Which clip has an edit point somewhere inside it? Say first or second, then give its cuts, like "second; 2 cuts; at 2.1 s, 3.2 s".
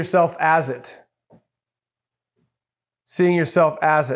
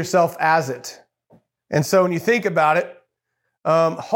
second; 1 cut; at 1.6 s